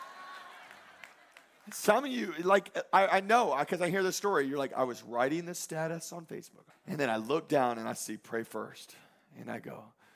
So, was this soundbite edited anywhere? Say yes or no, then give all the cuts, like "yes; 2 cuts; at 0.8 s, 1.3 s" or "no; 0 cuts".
yes; 1 cut; at 6.7 s